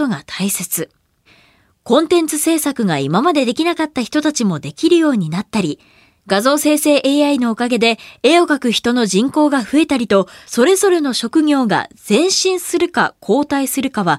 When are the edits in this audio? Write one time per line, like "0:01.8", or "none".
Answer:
0:10.4